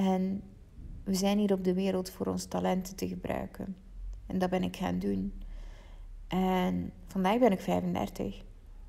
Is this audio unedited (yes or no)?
yes